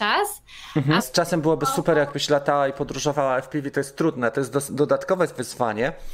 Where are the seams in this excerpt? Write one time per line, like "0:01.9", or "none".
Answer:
0:01.0

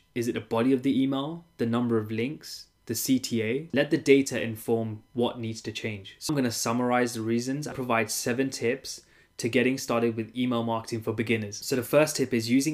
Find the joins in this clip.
0:03.7
0:06.3
0:07.7

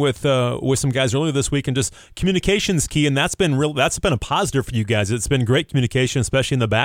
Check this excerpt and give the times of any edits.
none

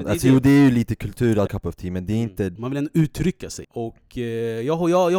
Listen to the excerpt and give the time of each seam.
0:01.5
0:02.6
0:03.6

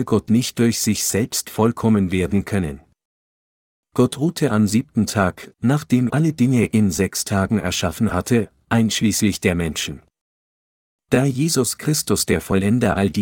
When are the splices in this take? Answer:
0:06.1

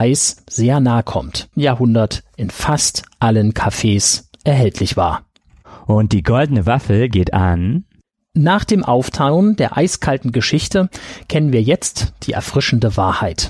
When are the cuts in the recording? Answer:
0:01.5

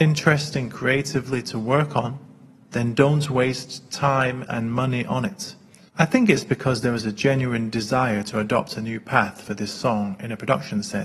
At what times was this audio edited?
0:04.5
0:05.9

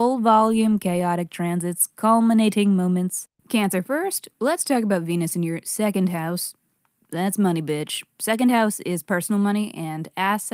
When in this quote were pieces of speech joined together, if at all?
0:03.4

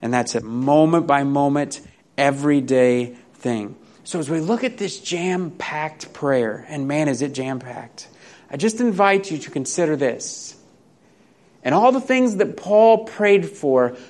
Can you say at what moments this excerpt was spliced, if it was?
none

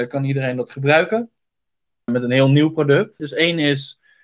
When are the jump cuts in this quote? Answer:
0:02.1
0:03.2

